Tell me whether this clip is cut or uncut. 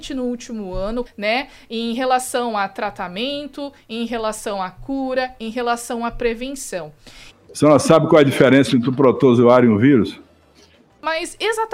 cut